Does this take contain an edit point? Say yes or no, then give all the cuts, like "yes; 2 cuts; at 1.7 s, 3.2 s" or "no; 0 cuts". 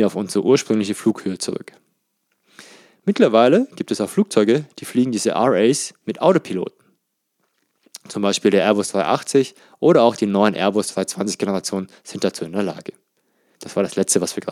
yes; 1 cut; at 13.6 s